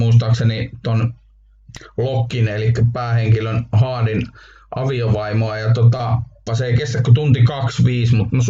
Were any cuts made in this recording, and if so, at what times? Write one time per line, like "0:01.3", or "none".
0:06.5